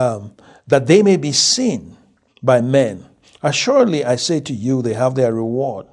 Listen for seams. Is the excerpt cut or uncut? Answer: uncut